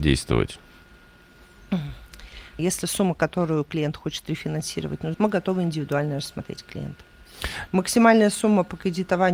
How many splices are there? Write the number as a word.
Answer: three